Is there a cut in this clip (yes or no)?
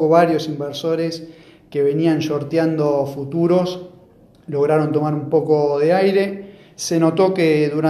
no